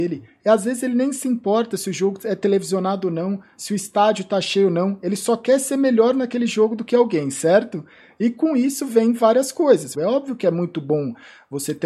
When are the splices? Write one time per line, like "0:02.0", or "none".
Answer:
0:09.9